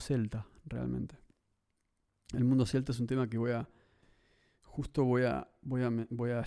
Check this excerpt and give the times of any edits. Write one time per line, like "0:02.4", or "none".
none